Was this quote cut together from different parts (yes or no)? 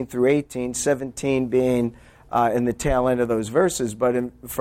no